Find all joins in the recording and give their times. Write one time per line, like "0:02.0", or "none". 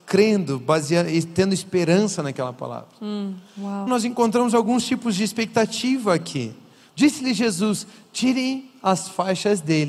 0:03.9
0:06.9